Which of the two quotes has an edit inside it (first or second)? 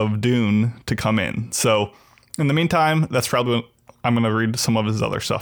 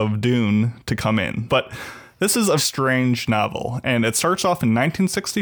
second